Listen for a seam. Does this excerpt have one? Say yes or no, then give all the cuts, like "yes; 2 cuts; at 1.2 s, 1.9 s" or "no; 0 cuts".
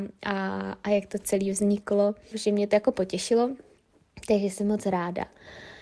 yes; 1 cut; at 2.3 s